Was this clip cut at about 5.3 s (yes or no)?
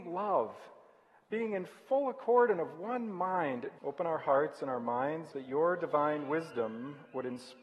yes